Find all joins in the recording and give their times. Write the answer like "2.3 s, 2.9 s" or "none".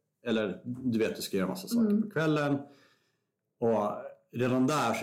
none

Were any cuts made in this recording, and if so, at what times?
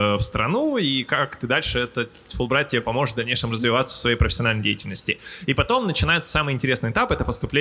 none

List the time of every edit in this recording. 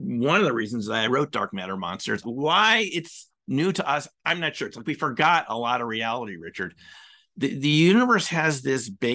2.2 s

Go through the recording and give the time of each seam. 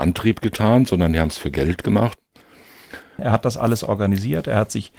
3.2 s

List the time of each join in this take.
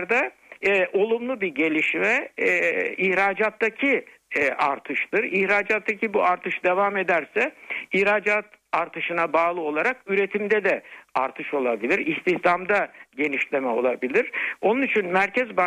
none

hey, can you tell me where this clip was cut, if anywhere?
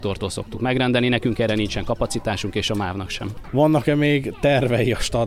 3.4 s

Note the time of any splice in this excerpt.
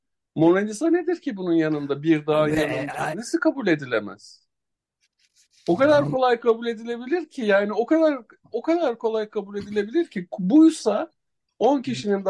3.1 s

